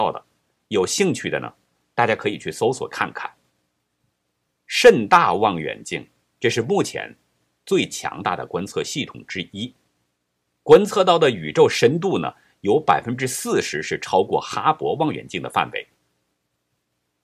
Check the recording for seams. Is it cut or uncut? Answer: cut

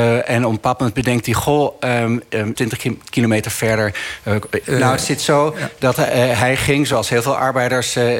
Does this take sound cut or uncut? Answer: cut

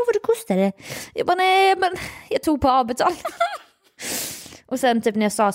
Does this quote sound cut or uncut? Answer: uncut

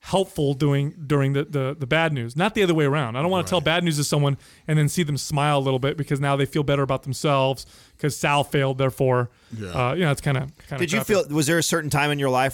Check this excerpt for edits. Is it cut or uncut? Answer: cut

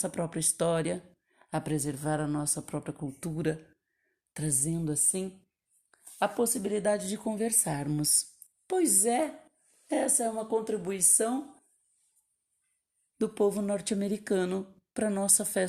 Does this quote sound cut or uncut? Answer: cut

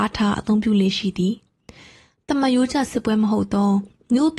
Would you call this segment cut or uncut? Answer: uncut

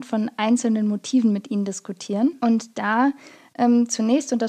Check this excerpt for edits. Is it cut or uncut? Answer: uncut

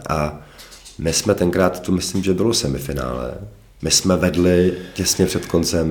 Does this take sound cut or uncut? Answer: cut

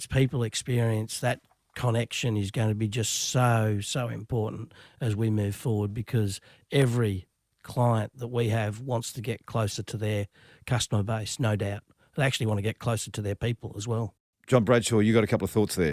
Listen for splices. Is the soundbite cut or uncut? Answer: uncut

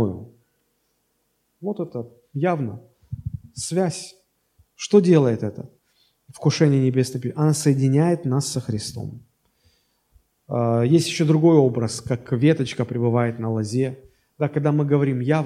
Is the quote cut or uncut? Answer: uncut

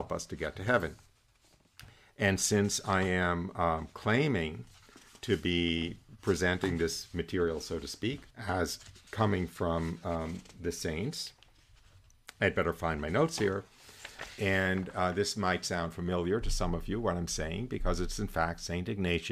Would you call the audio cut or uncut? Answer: cut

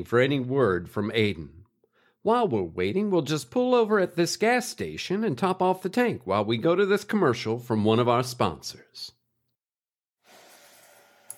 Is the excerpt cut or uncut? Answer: uncut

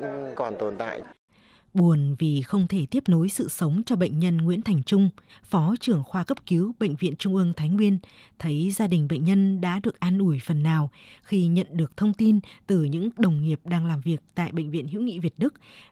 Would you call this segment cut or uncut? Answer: cut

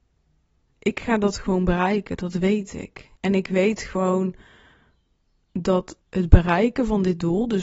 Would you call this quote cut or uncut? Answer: cut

